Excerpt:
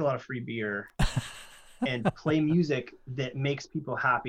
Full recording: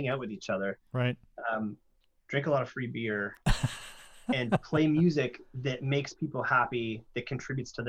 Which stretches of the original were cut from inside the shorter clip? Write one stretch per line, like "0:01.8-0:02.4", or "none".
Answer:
none